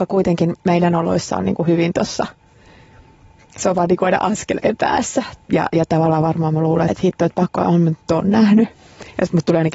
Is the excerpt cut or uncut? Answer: cut